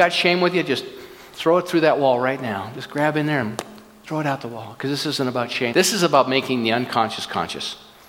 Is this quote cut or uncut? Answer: cut